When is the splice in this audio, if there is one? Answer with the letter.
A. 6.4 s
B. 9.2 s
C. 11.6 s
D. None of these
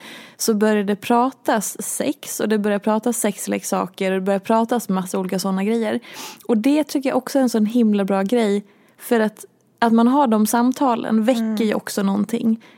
D